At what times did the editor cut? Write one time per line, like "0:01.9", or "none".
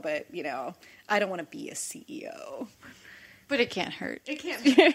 none